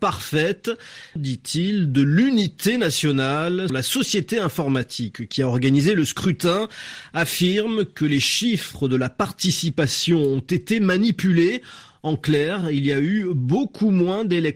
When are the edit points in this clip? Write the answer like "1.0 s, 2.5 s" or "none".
1.2 s, 3.7 s